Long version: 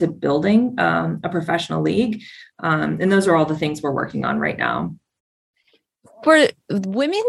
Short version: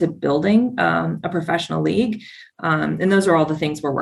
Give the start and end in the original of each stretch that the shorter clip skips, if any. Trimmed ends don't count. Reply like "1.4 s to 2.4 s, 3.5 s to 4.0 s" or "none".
none